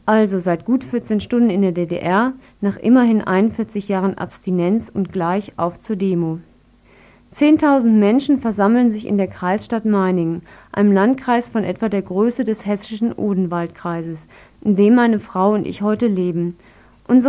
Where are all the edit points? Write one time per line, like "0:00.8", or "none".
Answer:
none